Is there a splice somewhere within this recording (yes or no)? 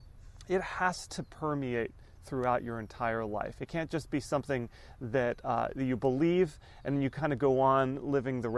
yes